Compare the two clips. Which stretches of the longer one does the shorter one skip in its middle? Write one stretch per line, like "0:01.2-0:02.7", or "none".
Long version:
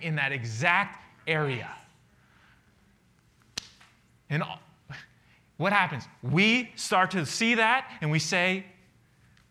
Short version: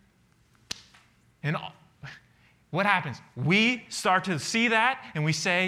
none

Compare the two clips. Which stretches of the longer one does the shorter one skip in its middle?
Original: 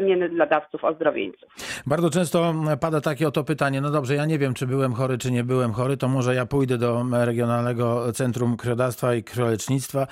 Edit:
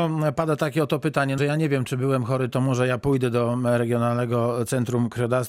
0:03.8-0:04.1
0:05.2-0:06.0

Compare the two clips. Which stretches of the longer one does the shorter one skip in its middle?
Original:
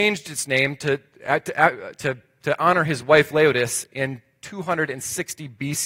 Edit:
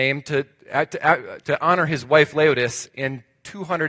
0:01.9-0:02.4

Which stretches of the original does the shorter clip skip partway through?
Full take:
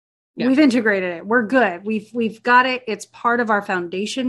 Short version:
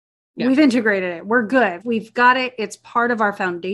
0:01.8-0:02.1

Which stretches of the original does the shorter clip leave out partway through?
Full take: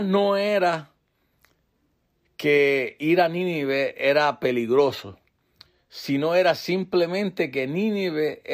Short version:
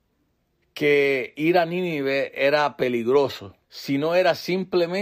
0:05.3-0:05.8

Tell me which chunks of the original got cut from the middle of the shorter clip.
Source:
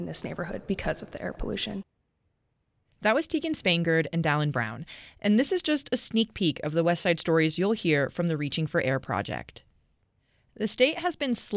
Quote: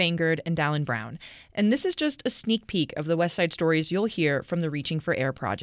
none

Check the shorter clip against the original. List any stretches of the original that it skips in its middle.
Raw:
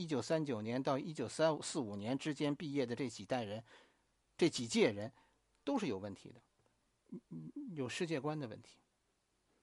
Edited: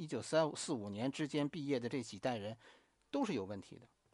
0:04.0-0:05.5

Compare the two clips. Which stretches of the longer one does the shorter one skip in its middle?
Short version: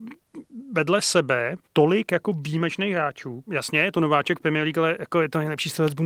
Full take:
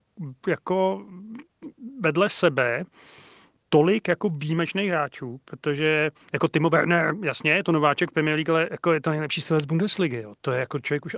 0:02.9-0:03.6
0:05.4-0:07.2

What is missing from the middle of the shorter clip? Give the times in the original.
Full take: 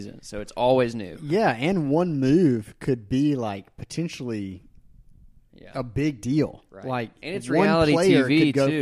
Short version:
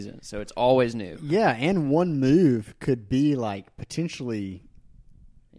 none

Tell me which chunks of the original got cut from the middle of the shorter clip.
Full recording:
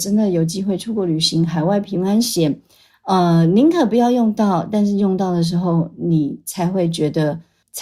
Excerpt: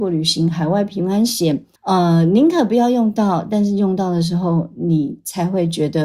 0:02.7-0:03.0

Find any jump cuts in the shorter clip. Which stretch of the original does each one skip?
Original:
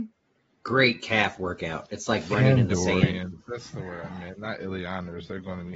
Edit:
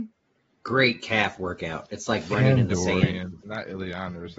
0:03.4-0:04.4

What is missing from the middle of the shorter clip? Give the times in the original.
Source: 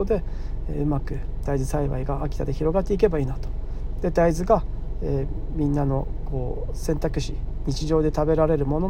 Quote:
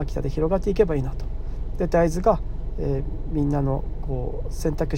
none

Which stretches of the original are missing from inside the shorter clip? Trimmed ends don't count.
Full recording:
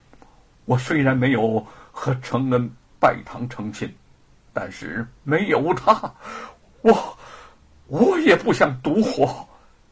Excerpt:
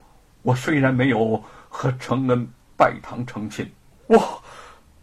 0:04.1-0:06.7

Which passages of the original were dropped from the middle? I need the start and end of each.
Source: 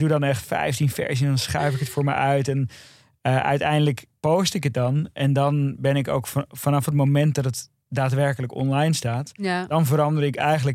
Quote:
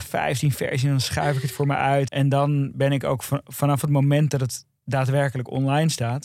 0:02.5-0:05.1

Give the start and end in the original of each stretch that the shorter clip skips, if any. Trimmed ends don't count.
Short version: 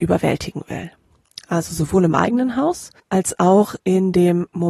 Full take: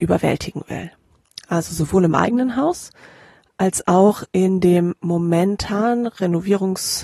0:03.0-0:03.5

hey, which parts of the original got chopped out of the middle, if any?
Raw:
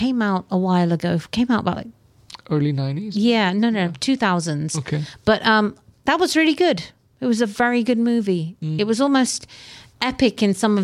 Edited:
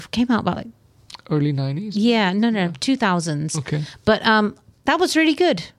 none

